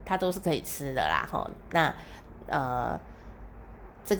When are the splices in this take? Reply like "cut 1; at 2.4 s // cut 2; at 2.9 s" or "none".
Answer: none